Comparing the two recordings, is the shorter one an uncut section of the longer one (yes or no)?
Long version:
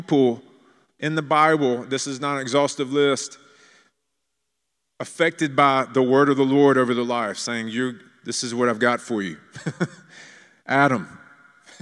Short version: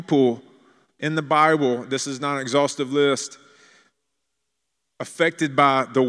yes